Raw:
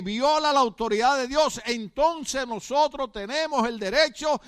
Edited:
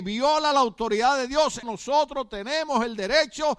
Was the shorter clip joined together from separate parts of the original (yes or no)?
yes